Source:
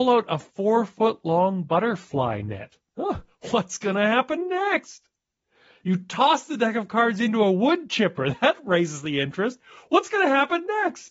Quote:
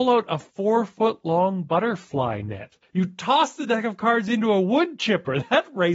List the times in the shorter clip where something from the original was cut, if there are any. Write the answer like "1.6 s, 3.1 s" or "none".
2.8 s